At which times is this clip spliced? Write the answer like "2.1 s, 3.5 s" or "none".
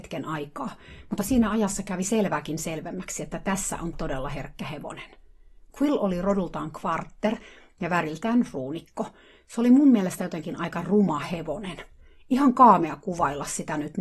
3.9 s